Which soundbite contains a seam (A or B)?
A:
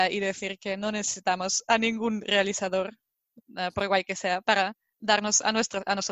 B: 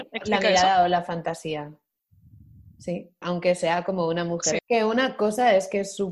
B